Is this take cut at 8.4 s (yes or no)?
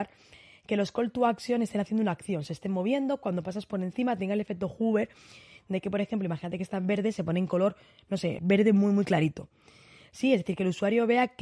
yes